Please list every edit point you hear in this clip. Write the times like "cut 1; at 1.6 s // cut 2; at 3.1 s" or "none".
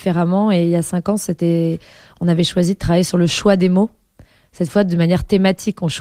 none